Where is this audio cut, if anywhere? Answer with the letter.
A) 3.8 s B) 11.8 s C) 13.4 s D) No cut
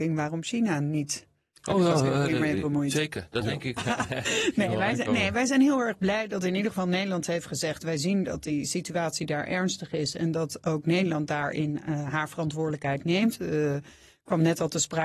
A